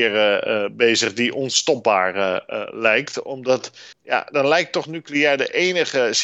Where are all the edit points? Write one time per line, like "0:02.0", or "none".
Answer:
0:03.9